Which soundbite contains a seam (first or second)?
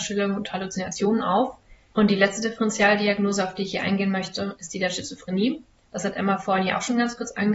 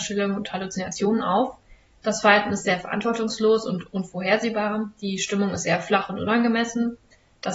first